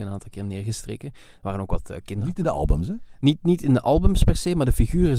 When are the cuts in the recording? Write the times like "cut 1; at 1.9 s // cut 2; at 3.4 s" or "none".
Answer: none